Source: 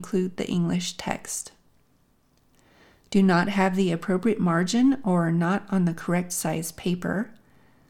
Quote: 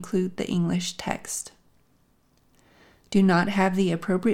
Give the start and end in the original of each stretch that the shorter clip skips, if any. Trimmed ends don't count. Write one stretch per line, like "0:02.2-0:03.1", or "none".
none